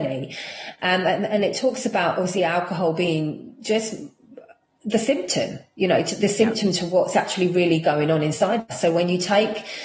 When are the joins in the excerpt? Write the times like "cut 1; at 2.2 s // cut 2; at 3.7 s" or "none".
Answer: none